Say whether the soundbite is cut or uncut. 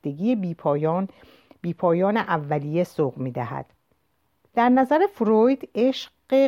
cut